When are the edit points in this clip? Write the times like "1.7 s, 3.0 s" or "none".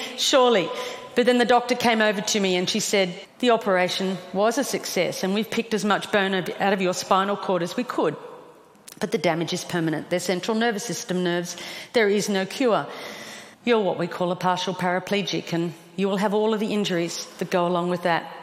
3.2 s, 13.5 s